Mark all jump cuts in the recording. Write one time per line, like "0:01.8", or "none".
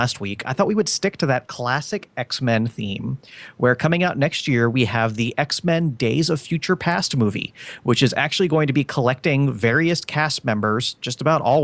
none